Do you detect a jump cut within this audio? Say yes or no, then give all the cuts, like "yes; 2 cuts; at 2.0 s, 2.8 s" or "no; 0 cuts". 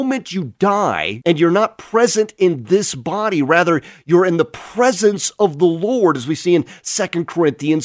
yes; 1 cut; at 1.2 s